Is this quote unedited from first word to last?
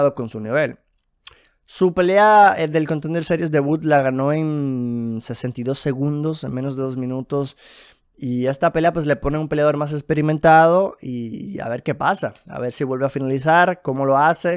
yes; 0 cuts

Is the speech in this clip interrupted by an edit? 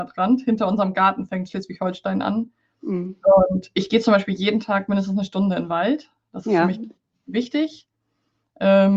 no; 0 cuts

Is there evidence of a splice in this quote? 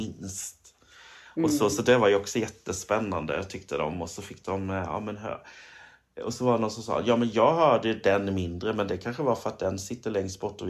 no; 0 cuts

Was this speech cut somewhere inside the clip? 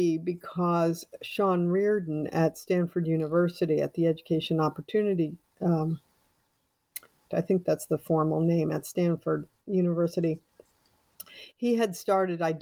yes; 1 cut; at 7.3 s

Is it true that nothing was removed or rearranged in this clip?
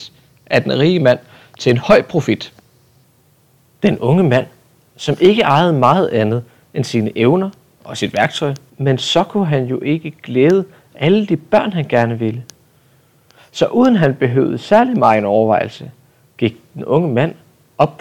no; 1 cut; at 8.7 s

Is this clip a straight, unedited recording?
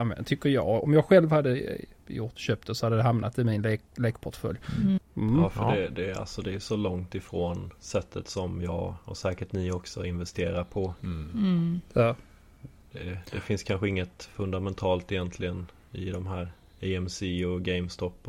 no; 1 cut; at 5.0 s

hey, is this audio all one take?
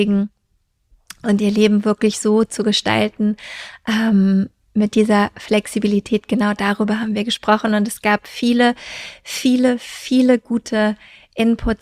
yes; 0 cuts

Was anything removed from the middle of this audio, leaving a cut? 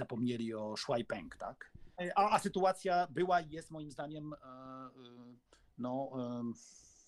yes; 1 cut; at 1.9 s

